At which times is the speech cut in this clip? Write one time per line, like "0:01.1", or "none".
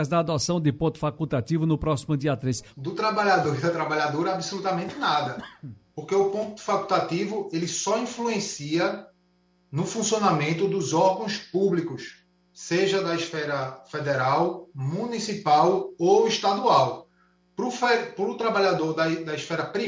0:02.7

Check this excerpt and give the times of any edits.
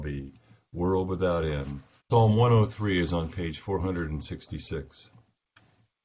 0:02.0

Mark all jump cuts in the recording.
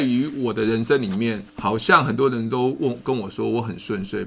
0:01.5

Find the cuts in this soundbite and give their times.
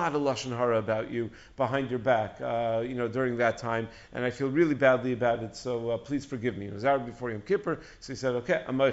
none

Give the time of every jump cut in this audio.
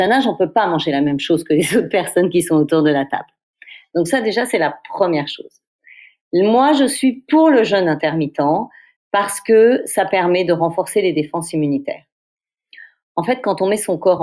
none

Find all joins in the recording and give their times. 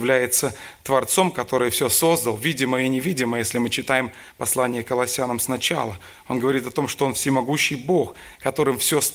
none

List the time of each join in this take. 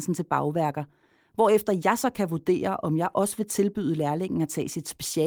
none

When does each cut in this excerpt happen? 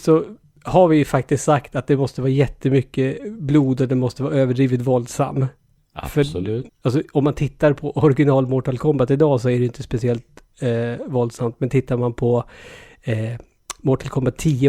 0:06.7

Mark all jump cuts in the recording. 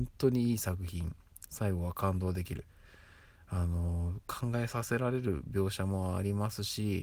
none

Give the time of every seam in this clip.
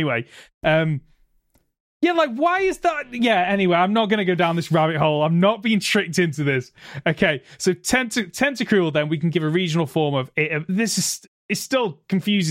0:10.7

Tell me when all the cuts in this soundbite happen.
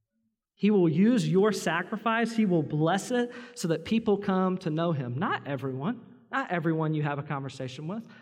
none

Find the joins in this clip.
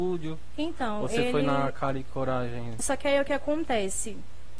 0:02.8

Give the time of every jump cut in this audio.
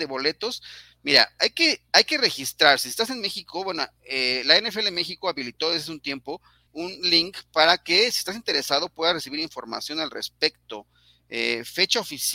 0:06.7

